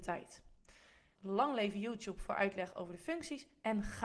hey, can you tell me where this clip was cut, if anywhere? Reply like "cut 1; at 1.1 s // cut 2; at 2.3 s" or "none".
cut 1; at 1.2 s